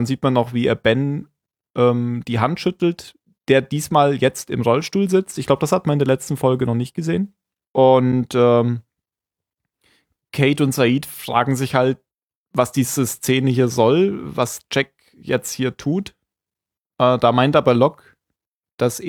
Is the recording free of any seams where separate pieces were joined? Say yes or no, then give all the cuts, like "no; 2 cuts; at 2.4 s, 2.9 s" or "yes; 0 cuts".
no; 1 cut; at 7.6 s